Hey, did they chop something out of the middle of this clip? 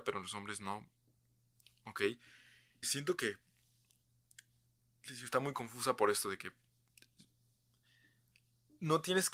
yes; 1 cut; at 2.8 s

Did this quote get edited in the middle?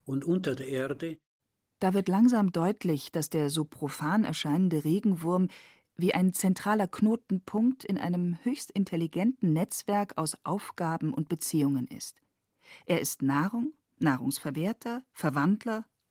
no; 0 cuts

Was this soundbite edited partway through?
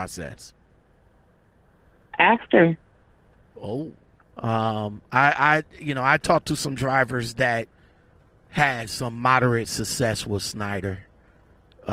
yes; 1 cut; at 4.2 s

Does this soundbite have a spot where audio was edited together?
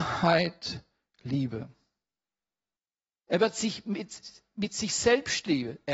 no; 0 cuts

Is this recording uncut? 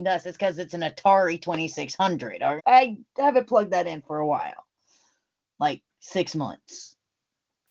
no; 1 cut; at 2.6 s

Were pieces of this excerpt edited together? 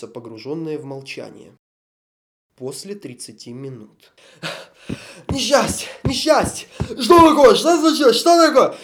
no; 0 cuts

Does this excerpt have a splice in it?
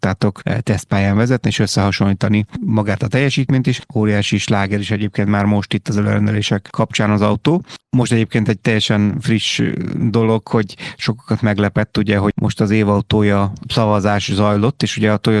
yes; 1 cut; at 3.8 s

